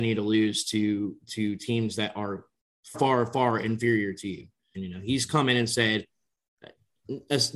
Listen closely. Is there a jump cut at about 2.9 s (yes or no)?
yes